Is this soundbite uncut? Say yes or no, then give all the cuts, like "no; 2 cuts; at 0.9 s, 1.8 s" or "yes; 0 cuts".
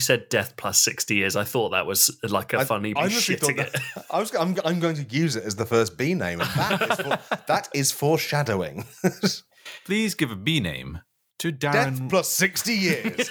no; 1 cut; at 3.0 s